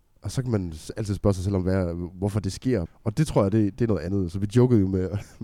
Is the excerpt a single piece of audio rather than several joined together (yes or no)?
no